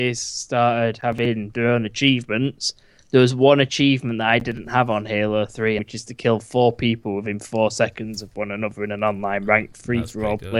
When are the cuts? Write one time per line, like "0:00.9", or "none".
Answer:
0:05.8